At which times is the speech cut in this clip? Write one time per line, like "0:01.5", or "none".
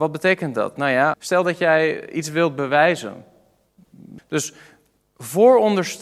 0:01.1
0:04.2